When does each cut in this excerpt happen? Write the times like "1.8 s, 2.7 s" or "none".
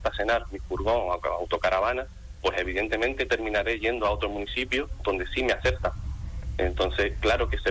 none

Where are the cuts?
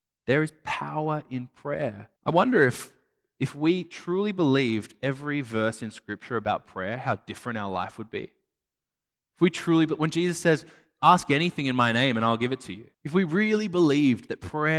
2.2 s, 12.9 s

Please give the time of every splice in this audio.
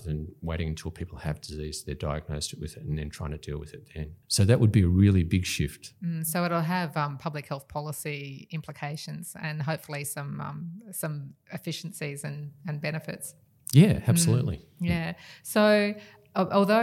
4.2 s

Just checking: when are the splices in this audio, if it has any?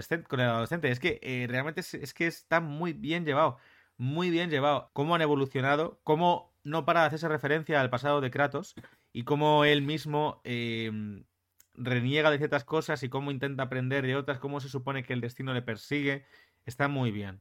4.9 s

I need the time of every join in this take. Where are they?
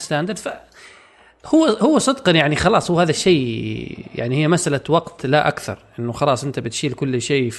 none

